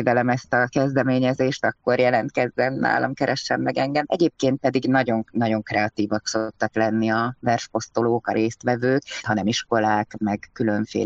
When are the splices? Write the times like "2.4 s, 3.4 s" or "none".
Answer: 4.1 s, 9.2 s